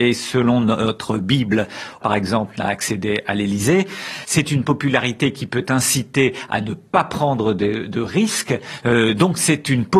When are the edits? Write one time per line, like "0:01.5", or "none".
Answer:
0:02.0